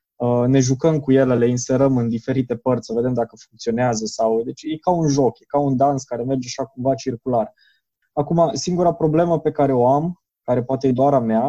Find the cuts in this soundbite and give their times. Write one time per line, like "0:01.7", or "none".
0:08.0